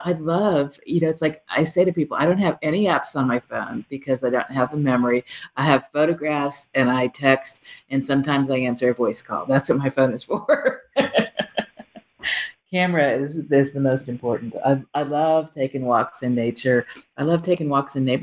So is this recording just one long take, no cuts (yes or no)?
yes